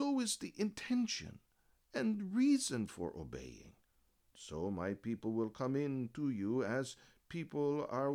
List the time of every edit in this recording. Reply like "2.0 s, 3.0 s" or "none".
4.3 s